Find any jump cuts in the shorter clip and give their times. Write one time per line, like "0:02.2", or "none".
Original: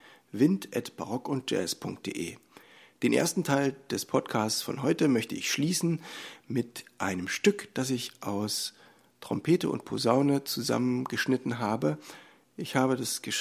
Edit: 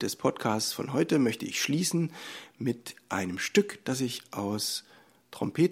none